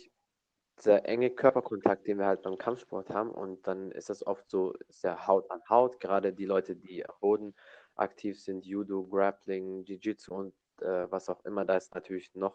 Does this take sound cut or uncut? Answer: uncut